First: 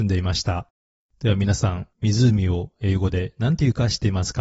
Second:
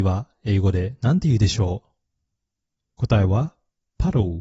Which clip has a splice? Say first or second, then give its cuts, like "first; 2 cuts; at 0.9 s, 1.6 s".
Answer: first; 1 cut; at 1.0 s